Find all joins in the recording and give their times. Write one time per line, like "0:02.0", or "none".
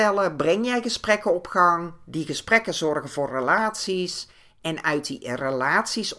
none